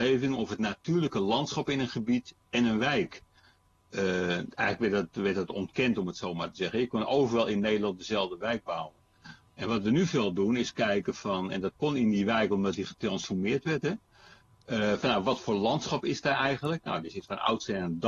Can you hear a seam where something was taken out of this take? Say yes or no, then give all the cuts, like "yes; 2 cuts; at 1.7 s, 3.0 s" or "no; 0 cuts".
no; 0 cuts